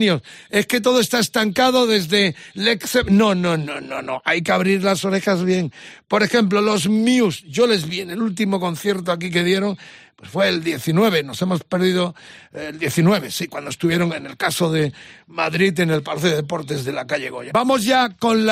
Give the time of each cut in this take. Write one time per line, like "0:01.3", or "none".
0:17.5